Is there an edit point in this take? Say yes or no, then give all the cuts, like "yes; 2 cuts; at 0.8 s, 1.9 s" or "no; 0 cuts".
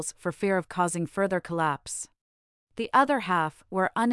yes; 1 cut; at 2.7 s